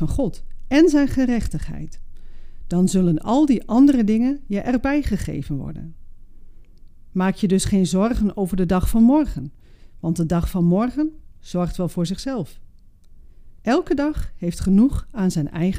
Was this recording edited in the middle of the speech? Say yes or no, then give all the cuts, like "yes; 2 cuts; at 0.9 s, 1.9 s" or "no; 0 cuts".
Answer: yes; 1 cut; at 13.6 s